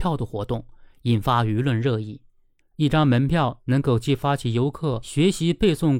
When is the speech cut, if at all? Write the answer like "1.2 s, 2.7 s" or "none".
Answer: 2.6 s